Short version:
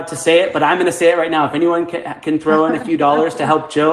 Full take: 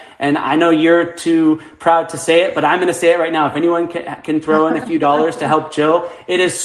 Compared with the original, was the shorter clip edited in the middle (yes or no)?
no